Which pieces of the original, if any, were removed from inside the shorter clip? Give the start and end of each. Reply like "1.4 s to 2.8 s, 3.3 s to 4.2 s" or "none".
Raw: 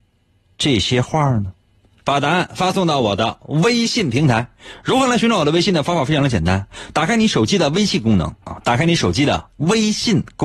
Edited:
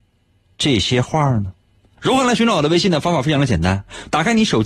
2.0 s to 4.8 s